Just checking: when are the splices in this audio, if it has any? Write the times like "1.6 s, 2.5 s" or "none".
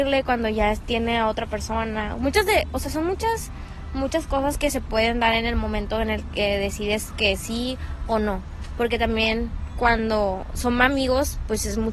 none